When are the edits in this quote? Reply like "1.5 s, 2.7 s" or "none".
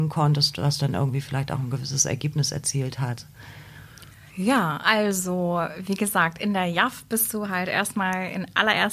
4.3 s